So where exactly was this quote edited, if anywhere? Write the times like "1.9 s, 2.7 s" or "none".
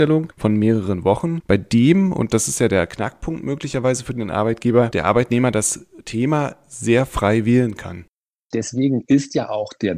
8.5 s